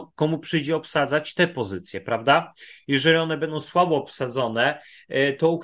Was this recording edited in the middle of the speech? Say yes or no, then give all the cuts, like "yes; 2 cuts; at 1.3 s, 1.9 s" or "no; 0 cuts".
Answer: no; 0 cuts